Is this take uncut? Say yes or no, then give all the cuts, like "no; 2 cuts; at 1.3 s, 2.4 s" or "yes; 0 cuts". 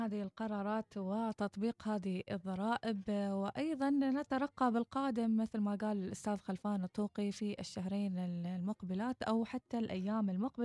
yes; 0 cuts